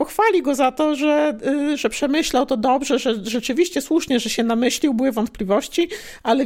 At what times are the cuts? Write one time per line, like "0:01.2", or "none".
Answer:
none